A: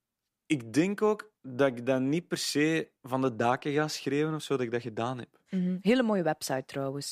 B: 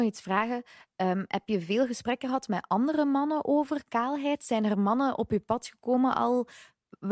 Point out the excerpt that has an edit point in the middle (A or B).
A